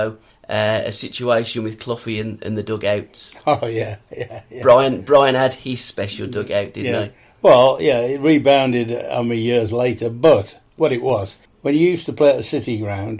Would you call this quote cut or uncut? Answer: uncut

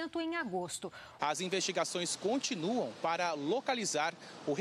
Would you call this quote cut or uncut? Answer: cut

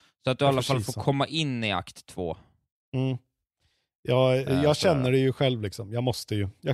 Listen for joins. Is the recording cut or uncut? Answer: uncut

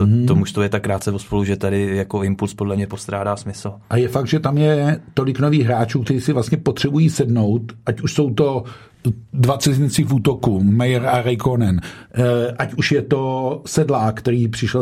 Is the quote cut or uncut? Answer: uncut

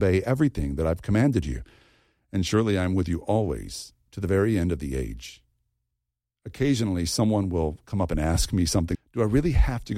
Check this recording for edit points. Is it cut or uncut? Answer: cut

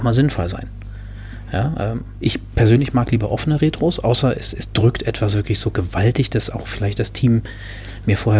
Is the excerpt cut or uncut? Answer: uncut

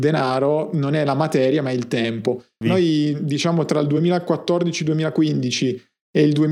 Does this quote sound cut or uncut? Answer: cut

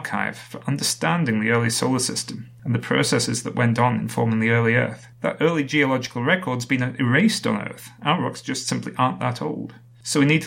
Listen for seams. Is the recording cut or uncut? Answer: cut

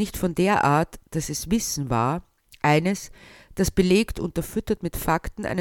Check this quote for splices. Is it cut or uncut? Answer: cut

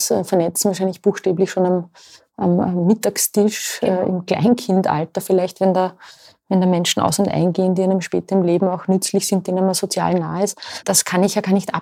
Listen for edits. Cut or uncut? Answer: uncut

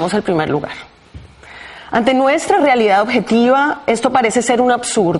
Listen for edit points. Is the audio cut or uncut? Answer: uncut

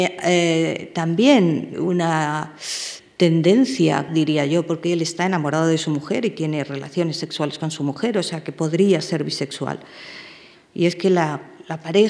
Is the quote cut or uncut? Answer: cut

